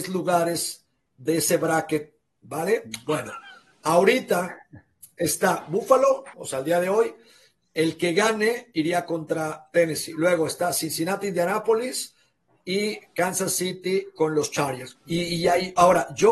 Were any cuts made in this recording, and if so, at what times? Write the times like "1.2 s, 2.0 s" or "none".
6.3 s, 14.9 s

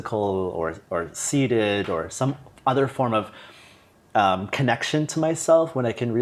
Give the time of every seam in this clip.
none

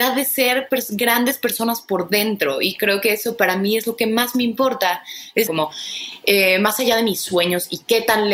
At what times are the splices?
5.5 s

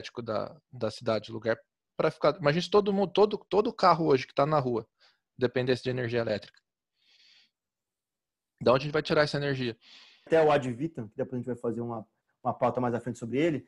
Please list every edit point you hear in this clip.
none

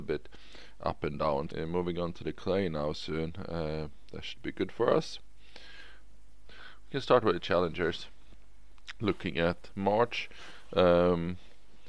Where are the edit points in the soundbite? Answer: 1.5 s, 6.4 s, 9.0 s

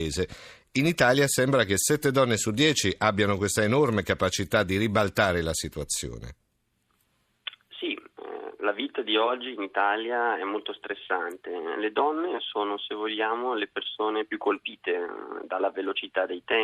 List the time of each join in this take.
none

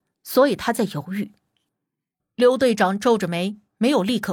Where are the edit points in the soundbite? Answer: 2.2 s

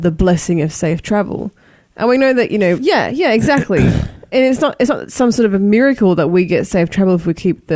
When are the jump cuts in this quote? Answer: 2.8 s

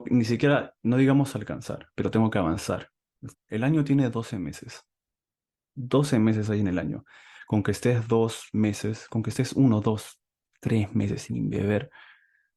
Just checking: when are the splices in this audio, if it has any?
3.3 s

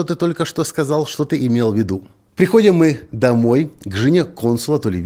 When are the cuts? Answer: 2.3 s

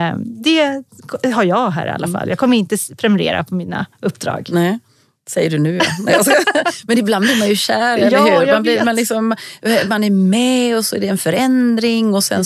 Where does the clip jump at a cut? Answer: none

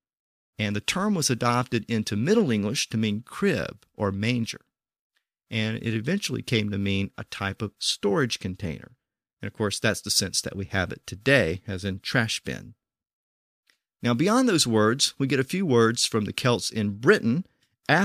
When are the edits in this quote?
none

